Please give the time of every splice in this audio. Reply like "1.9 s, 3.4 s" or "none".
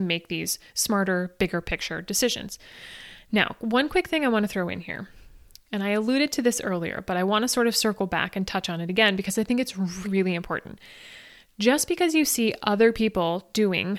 10.0 s